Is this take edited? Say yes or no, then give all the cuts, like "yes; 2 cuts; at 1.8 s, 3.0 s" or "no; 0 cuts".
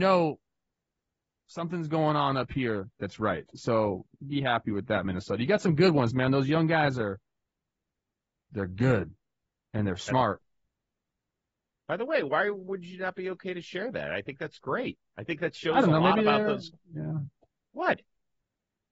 no; 0 cuts